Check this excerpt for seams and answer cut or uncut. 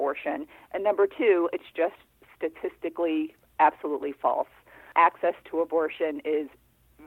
uncut